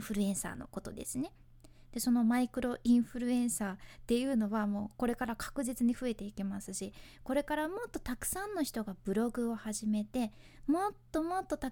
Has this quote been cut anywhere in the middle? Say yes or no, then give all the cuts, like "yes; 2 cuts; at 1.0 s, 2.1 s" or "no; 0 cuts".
no; 0 cuts